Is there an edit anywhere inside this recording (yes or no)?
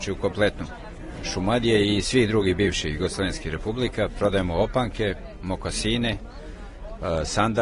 no